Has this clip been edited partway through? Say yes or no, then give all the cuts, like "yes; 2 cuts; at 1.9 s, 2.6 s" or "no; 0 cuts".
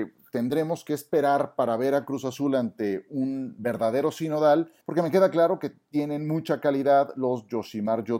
yes; 1 cut; at 4.8 s